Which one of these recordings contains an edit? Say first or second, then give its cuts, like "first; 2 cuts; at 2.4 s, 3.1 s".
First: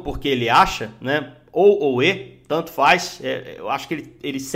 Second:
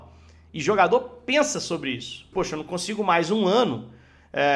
second; 1 cut; at 2.3 s